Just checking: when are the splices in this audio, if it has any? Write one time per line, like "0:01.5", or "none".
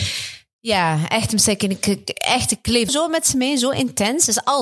0:02.9

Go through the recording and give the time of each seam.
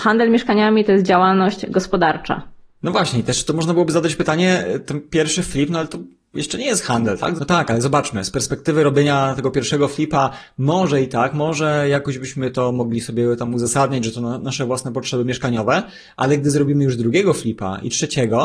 0:07.4

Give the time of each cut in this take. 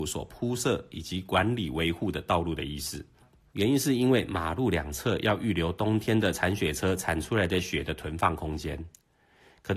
0:03.5

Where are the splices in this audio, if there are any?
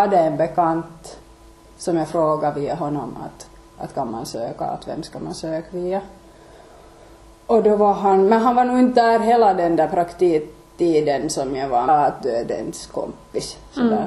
0:11.9

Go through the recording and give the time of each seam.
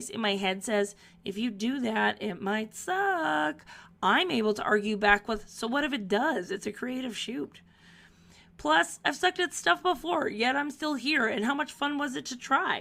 none

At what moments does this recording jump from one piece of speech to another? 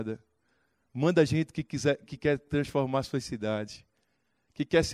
0:02.0

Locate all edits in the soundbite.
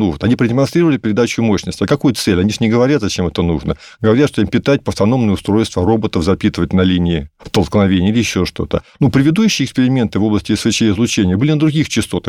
none

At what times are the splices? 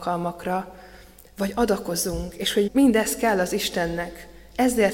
0:02.7

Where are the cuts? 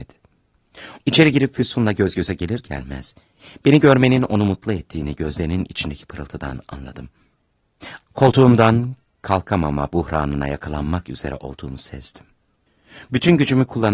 0:01.0
0:08.0

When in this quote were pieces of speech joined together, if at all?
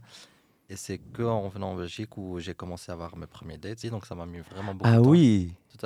0:03.8

